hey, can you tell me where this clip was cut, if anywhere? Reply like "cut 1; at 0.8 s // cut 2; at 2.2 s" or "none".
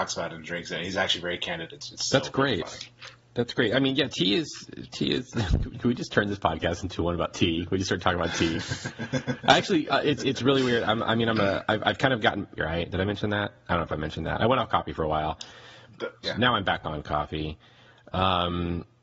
cut 1; at 12.6 s // cut 2; at 16.2 s